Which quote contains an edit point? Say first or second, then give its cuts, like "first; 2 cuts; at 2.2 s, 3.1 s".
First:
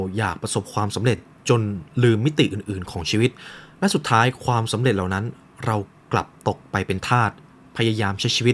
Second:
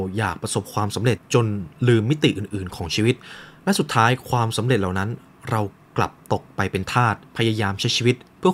second; 2 cuts; at 1.2 s, 7.3 s